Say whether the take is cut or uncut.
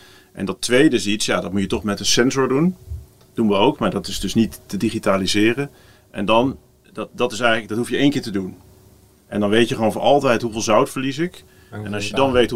uncut